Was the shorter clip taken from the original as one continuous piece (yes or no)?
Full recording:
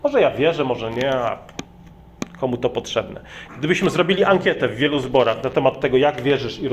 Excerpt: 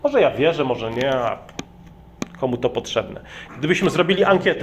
yes